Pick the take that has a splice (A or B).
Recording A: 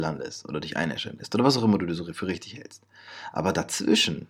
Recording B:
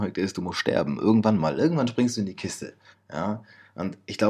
B